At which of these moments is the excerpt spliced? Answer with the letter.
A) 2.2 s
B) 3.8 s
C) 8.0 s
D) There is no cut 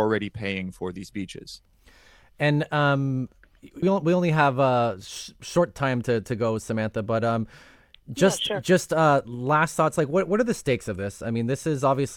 B